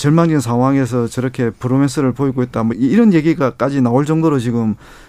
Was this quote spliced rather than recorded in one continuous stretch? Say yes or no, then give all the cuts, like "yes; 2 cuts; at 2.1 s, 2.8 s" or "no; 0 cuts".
yes; 1 cut; at 2.7 s